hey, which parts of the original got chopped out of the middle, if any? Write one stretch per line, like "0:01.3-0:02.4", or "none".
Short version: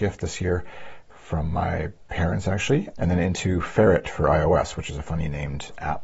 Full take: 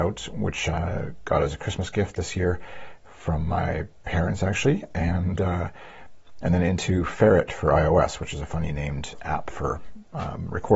0:04.9-0:06.4